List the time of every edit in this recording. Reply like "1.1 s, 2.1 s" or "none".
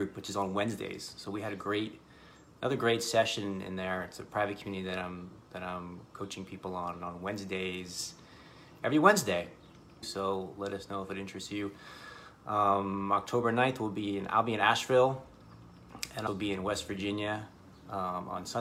10.0 s, 16.3 s